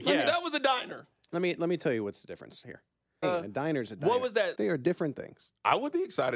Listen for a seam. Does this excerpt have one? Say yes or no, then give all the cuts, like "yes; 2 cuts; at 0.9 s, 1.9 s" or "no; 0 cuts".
yes; 2 cuts; at 3.2 s, 4.5 s